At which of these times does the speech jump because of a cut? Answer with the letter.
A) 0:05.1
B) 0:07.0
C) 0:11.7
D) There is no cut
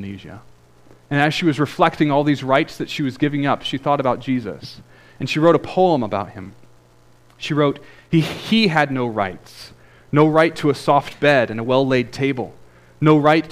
D